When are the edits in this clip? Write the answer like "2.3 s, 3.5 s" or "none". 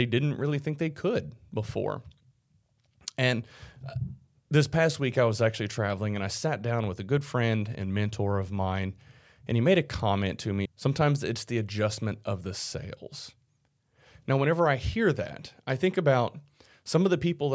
10.6 s